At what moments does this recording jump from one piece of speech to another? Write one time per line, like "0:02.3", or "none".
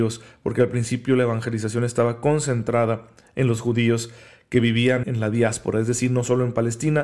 0:05.0